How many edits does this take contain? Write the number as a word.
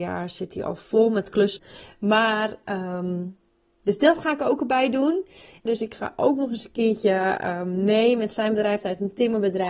two